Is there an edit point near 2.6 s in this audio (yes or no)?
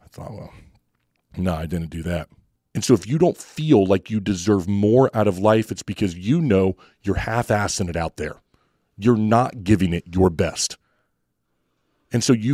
yes